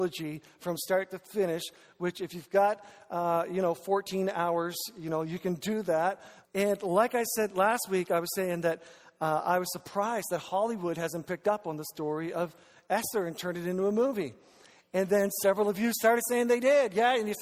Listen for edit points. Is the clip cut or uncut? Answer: cut